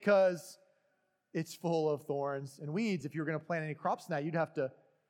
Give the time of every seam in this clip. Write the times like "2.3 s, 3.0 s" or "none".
none